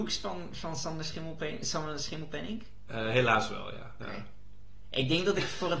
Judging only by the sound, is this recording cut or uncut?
cut